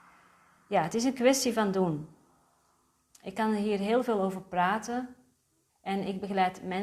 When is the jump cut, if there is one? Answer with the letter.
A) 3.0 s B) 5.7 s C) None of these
B